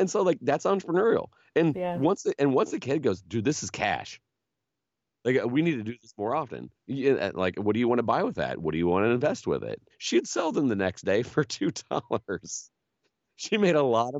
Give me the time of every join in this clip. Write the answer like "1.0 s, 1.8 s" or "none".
6.8 s, 9.9 s